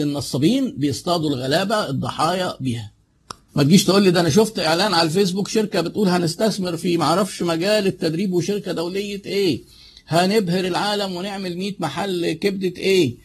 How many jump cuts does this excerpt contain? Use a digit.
1